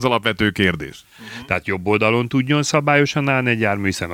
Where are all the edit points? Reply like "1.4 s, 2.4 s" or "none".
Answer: 1.2 s